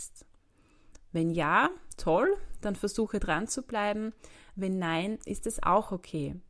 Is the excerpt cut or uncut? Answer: uncut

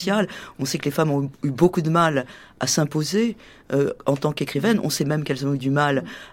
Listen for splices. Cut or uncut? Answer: uncut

